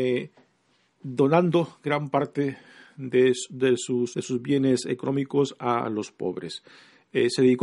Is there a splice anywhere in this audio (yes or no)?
yes